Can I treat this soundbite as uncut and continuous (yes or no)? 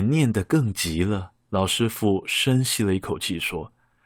no